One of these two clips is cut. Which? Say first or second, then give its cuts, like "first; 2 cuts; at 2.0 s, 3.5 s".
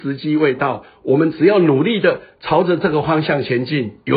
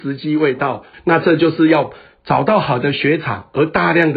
second; 1 cut; at 0.9 s